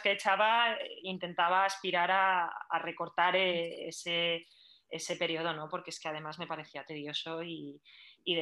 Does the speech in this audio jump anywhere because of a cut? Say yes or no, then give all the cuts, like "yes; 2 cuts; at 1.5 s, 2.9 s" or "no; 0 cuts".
no; 0 cuts